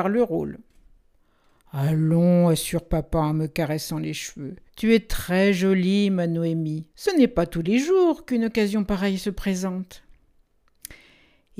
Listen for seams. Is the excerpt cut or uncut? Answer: cut